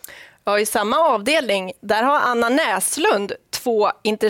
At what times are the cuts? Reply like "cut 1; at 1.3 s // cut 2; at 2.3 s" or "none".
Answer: none

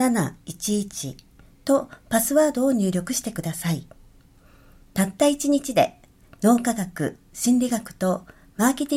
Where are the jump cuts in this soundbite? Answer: cut 1; at 4.8 s

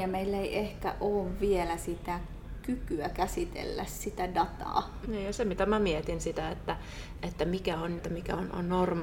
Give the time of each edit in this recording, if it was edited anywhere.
cut 1; at 5.0 s // cut 2; at 8.0 s

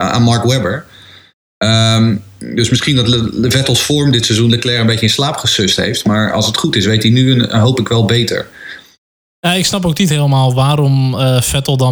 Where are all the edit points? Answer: none

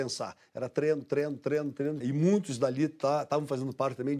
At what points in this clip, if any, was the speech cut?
cut 1; at 2.0 s

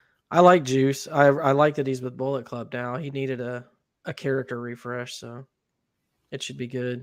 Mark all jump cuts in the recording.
none

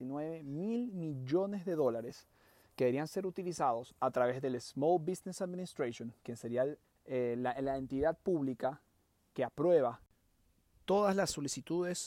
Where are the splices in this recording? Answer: cut 1; at 6.8 s

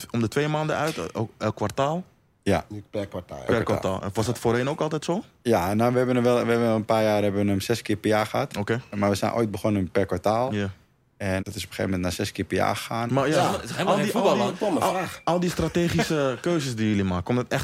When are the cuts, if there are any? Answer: cut 1; at 11.4 s // cut 2; at 13.1 s

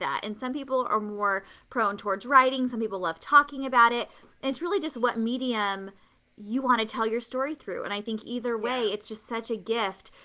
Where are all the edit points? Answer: none

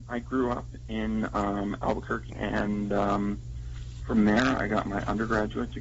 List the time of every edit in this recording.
cut 1; at 2.3 s

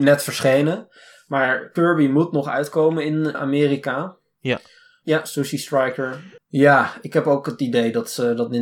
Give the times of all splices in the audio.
cut 1; at 3.3 s // cut 2; at 5.0 s // cut 3; at 6.4 s

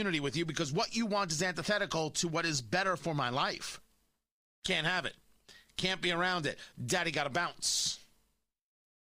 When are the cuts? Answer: none

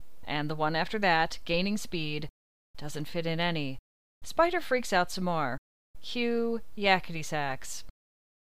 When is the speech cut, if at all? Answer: none

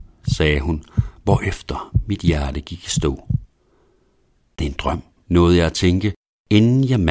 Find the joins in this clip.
cut 1; at 4.6 s

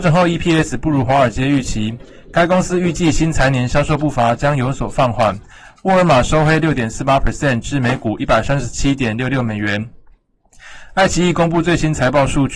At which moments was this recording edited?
none

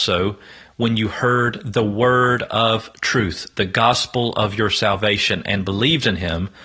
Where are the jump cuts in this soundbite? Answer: none

